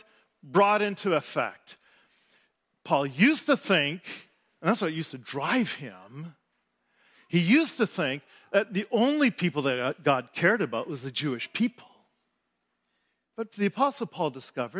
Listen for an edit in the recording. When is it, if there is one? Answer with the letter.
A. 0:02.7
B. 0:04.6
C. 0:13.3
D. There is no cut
C